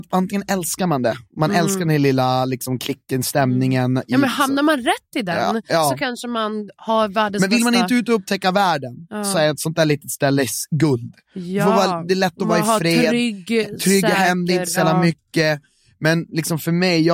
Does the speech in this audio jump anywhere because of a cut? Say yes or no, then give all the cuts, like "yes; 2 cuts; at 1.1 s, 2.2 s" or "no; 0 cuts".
no; 0 cuts